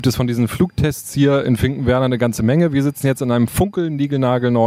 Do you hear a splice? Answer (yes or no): no